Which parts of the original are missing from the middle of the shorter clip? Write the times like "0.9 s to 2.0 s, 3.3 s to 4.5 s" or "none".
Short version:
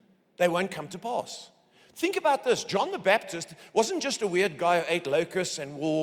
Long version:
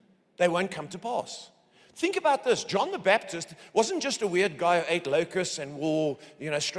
none